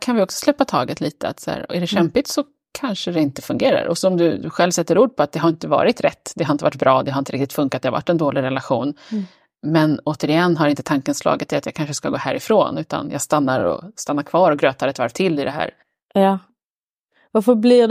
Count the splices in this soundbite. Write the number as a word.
zero